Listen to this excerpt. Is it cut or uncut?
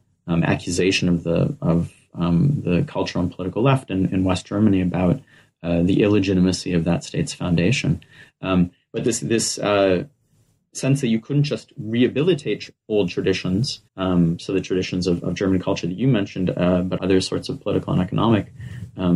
cut